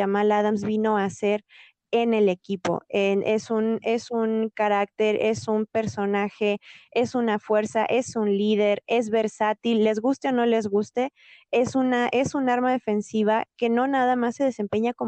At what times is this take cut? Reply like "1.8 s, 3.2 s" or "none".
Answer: none